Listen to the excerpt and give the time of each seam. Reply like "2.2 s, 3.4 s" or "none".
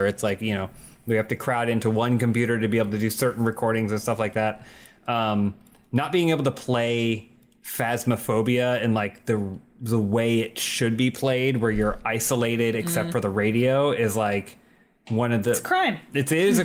none